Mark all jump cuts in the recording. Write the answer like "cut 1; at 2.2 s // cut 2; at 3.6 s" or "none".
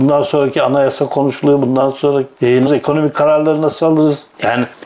cut 1; at 2.7 s